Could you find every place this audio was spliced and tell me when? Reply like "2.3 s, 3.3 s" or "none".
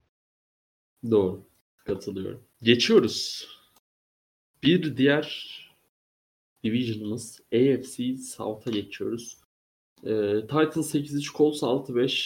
2.5 s